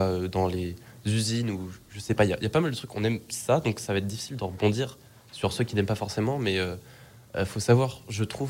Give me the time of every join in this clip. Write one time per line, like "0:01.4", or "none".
none